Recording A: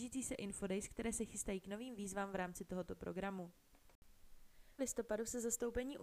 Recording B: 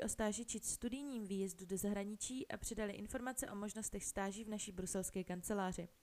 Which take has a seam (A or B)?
A